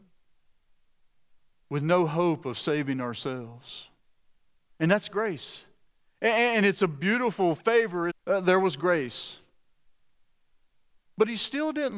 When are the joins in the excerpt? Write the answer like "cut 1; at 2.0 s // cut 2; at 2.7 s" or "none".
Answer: cut 1; at 1.6 s // cut 2; at 8.1 s